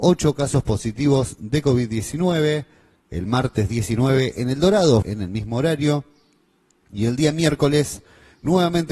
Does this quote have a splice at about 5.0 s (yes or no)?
yes